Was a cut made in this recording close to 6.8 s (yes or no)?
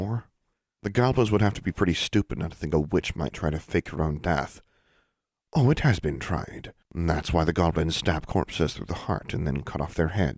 yes